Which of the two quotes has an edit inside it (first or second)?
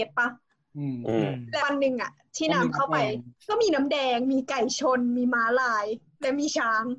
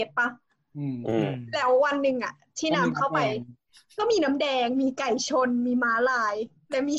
first